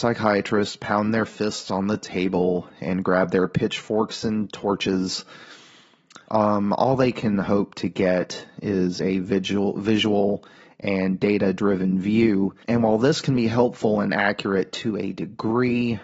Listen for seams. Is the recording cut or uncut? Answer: cut